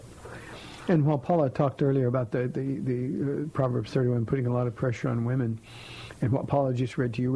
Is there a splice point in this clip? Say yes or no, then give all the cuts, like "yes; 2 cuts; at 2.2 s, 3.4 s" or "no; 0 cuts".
no; 0 cuts